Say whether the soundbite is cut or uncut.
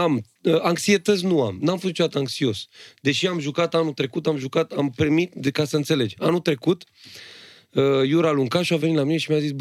uncut